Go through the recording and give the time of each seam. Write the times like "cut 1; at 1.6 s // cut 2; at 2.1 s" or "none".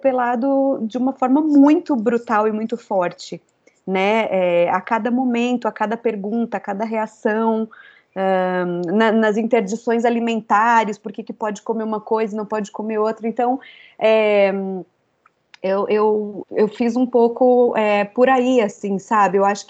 cut 1; at 16.4 s

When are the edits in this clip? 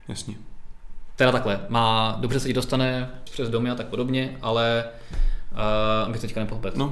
cut 1; at 3.3 s

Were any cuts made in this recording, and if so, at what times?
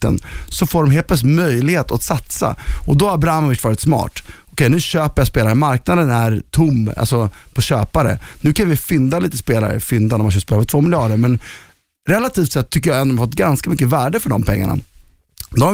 none

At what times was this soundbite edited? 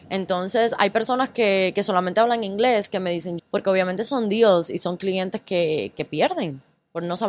cut 1; at 3.4 s // cut 2; at 5.9 s

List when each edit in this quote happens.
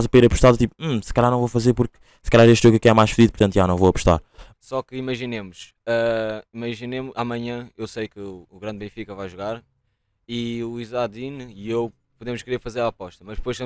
cut 1; at 4.5 s

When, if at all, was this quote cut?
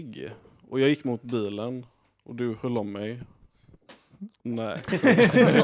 cut 1; at 4.4 s

